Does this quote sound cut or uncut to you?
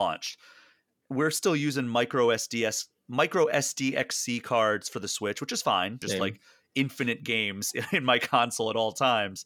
cut